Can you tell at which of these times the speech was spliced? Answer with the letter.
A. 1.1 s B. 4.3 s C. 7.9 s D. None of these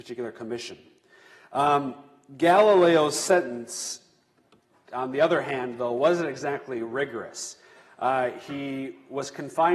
D